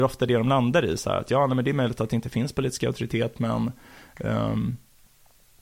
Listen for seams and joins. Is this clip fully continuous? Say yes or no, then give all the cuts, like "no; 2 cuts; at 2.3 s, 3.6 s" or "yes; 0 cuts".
yes; 0 cuts